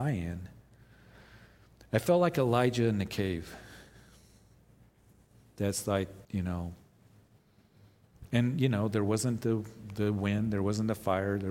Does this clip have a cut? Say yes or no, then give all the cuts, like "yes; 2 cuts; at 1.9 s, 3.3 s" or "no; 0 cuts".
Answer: yes; 1 cut; at 6.2 s